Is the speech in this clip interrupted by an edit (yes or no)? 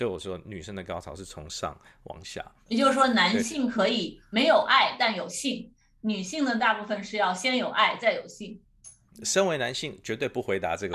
no